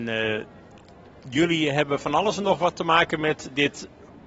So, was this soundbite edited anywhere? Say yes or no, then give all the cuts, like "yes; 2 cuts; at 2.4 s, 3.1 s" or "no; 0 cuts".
no; 0 cuts